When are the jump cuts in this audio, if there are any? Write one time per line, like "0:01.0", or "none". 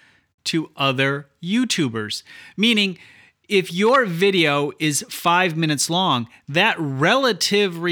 none